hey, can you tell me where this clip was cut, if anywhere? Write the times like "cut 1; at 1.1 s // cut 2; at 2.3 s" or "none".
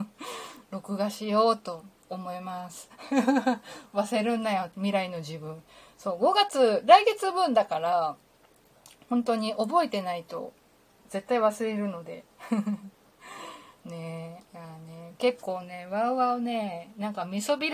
cut 1; at 11.0 s // cut 2; at 14.5 s